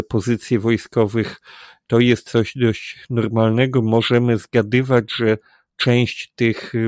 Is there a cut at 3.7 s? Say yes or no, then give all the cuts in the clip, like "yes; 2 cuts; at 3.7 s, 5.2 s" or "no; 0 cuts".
no; 0 cuts